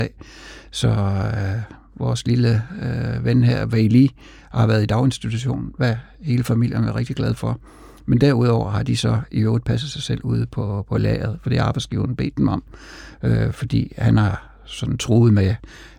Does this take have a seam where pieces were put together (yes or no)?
no